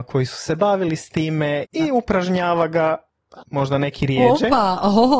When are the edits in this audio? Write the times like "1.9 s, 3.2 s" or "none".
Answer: 1.6 s, 3.4 s